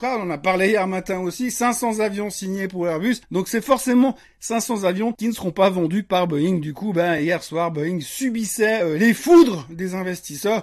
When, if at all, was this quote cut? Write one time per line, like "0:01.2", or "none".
none